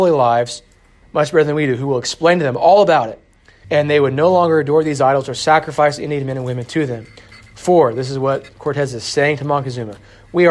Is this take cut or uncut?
cut